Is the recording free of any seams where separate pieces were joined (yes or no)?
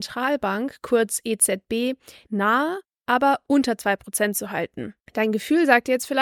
no